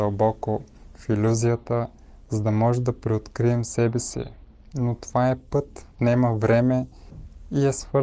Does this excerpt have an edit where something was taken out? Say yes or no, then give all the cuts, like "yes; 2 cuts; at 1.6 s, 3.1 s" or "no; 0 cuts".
yes; 1 cut; at 5.9 s